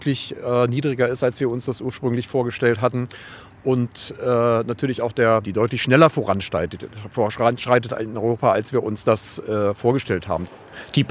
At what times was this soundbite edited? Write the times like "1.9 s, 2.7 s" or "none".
5.4 s